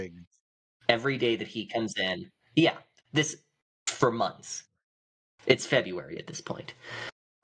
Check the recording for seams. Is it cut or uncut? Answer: uncut